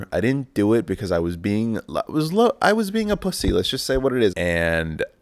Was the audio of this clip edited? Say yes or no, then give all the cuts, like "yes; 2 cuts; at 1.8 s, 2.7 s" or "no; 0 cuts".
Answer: yes; 1 cut; at 4.3 s